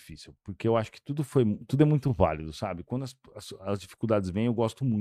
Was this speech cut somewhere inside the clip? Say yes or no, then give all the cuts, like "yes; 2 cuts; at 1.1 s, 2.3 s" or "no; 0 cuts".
no; 0 cuts